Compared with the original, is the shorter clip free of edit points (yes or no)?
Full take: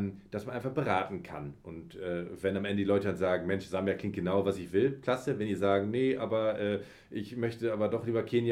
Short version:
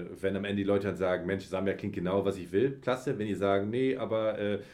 yes